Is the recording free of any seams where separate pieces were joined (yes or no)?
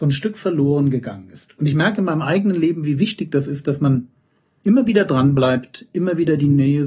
yes